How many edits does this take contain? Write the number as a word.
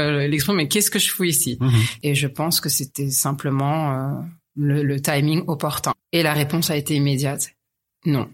one